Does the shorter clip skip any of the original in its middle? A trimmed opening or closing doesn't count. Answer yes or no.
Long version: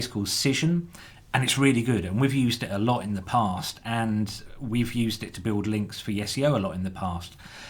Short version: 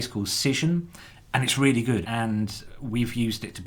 yes